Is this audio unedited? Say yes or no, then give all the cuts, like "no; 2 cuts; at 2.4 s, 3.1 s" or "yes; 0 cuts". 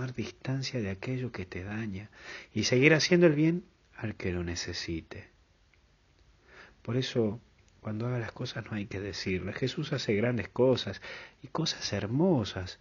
yes; 0 cuts